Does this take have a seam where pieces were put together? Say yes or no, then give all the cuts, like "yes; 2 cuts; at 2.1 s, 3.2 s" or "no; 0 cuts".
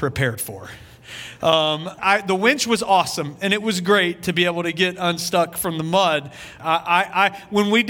yes; 2 cuts; at 2.0 s, 6.6 s